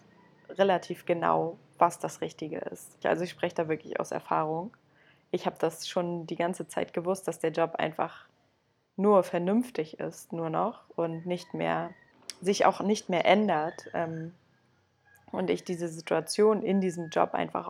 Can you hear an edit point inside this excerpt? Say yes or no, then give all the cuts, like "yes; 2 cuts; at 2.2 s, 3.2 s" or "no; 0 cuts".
yes; 1 cut; at 3.0 s